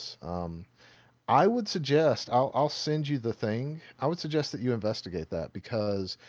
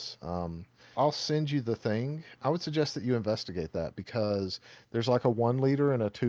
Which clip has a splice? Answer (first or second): second